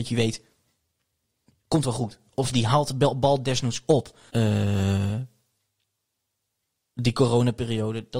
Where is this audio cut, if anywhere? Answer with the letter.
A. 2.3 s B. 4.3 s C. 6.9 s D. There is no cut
B